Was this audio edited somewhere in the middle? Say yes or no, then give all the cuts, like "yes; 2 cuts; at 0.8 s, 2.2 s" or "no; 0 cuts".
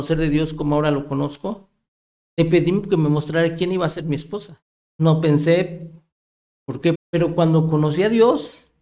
yes; 2 cuts; at 4.8 s, 6.9 s